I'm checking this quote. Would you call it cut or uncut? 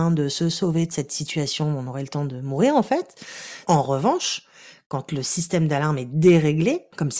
cut